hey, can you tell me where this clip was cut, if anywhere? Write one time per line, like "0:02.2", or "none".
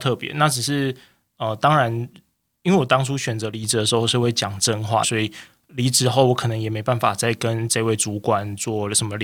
0:05.0